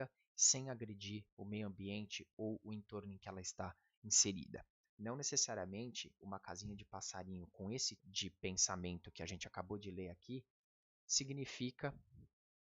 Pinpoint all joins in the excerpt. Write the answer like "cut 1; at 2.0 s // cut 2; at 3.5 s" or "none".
cut 1; at 4.8 s // cut 2; at 8.0 s